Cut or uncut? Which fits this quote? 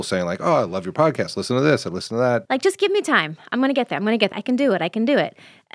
cut